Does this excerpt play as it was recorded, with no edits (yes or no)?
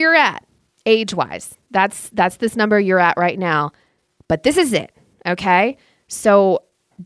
yes